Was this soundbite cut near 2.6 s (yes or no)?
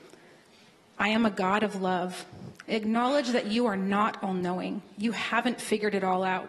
yes